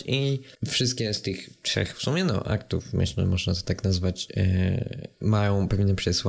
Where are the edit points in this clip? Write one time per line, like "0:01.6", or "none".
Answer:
none